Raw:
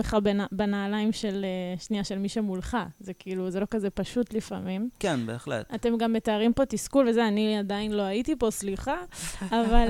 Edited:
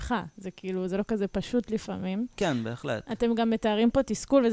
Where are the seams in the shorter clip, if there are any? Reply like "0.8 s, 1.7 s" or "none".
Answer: none